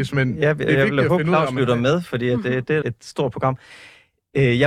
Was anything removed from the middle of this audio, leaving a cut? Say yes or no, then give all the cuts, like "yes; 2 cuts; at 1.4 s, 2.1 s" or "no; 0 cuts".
yes; 1 cut; at 2.8 s